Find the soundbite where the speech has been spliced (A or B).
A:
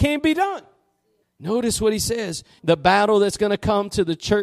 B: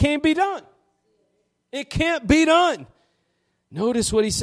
A